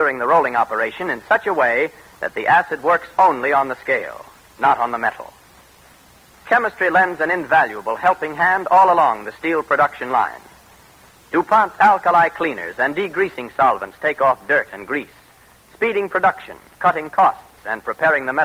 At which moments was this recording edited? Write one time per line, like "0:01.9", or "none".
none